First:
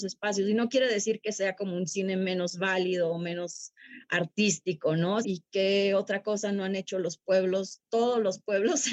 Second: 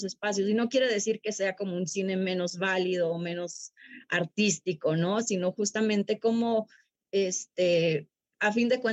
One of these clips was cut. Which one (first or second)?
first